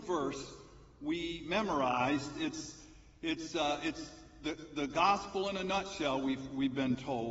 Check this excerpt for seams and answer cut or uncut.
uncut